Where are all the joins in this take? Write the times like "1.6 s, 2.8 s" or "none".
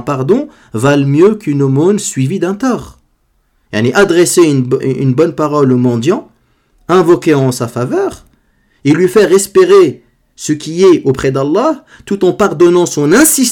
4.8 s